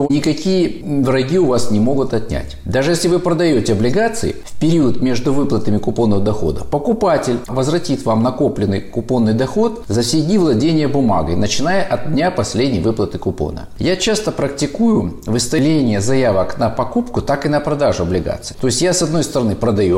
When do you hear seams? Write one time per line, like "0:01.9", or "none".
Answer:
0:13.8
0:18.5